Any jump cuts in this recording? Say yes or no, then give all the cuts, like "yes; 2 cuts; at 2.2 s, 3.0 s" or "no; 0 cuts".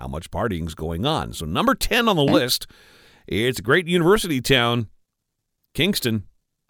no; 0 cuts